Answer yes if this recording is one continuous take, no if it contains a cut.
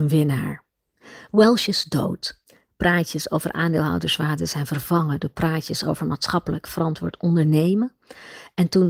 yes